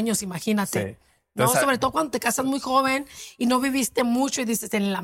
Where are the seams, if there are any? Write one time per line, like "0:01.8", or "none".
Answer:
none